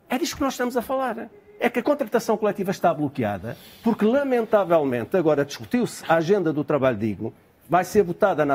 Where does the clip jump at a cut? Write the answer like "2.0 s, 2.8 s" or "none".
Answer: 1.6 s